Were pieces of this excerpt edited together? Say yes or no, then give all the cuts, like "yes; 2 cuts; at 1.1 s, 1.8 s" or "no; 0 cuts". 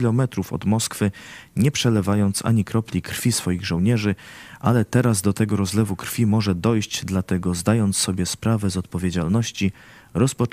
no; 0 cuts